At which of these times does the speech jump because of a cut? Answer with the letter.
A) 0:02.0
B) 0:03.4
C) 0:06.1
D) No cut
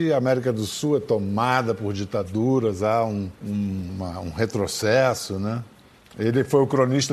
B